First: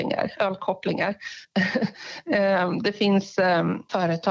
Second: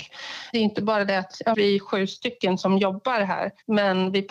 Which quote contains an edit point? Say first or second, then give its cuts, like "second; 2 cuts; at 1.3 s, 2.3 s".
second; 1 cut; at 1.5 s